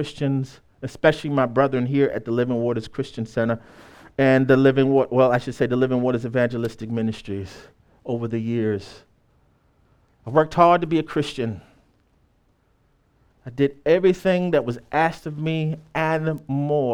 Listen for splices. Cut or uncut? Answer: uncut